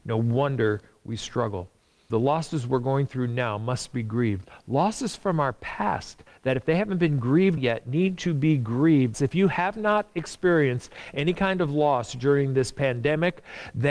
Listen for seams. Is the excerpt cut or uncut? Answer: cut